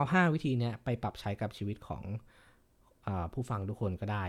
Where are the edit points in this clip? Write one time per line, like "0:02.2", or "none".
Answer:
none